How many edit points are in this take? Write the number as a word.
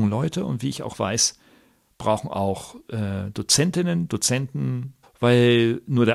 one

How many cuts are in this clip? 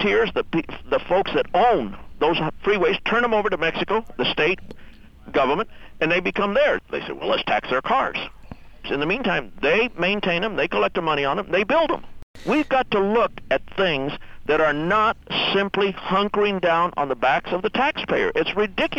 two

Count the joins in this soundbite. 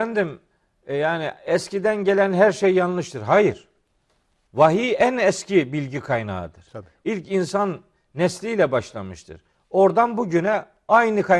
one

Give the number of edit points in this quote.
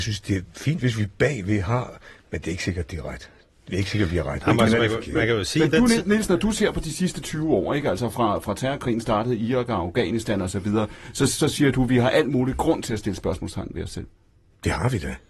zero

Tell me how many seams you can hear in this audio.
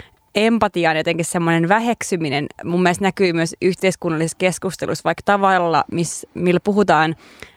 zero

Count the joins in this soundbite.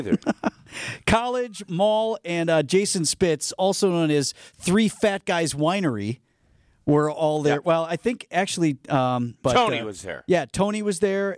one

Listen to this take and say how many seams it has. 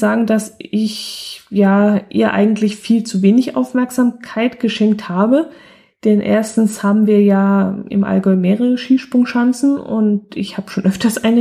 zero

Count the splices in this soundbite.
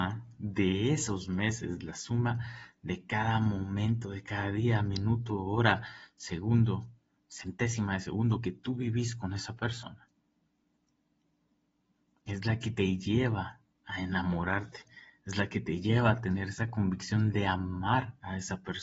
zero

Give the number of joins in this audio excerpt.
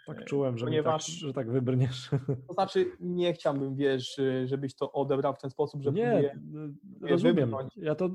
zero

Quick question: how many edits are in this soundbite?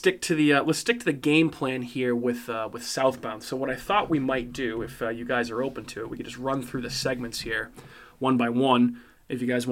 zero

